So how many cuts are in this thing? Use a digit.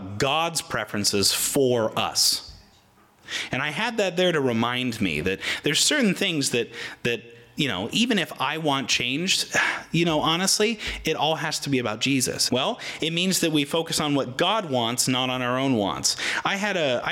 1